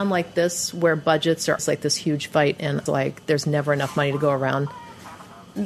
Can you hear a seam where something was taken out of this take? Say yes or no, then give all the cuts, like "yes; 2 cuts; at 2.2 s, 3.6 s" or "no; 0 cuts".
yes; 2 cuts; at 1.6 s, 2.9 s